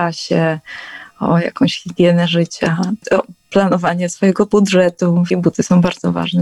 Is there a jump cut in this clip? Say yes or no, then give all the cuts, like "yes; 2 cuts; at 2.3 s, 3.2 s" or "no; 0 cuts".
yes; 2 cuts; at 3.0 s, 5.3 s